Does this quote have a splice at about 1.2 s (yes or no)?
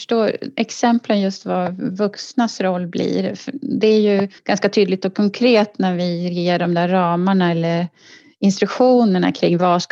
no